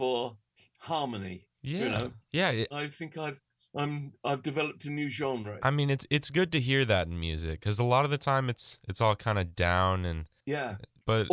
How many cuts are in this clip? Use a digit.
2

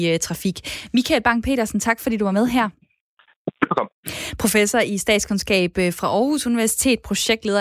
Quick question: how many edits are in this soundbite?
0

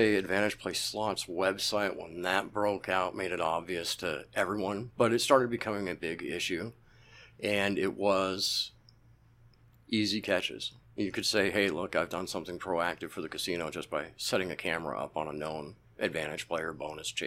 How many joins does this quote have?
0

